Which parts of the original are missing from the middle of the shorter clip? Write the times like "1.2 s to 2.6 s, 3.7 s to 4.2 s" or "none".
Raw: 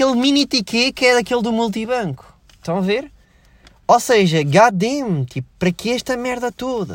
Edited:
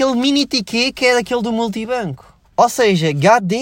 2.4 s to 3.7 s